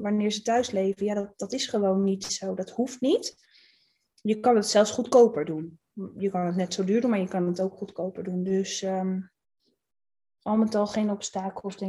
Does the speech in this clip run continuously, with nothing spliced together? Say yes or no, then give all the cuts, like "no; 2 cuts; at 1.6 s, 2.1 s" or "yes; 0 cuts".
yes; 0 cuts